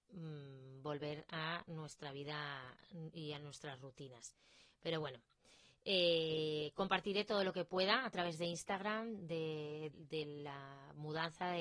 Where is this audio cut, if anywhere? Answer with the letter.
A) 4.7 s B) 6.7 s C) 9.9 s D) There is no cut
C